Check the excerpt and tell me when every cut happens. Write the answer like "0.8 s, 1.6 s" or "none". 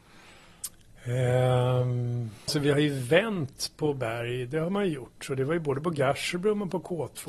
2.5 s